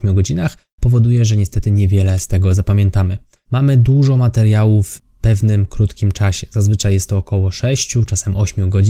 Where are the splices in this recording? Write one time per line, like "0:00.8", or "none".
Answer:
0:03.5